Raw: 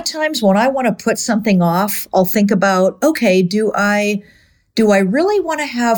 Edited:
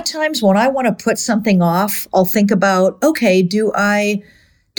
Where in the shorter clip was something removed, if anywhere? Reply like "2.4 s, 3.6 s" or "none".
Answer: none